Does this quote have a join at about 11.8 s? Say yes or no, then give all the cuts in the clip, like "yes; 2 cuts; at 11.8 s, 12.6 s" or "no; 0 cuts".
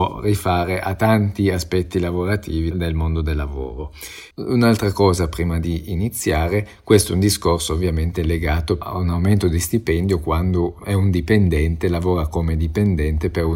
no; 2 cuts; at 2.7 s, 4.3 s